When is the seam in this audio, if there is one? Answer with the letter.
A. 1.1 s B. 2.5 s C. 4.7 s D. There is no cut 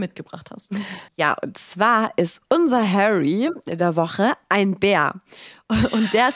A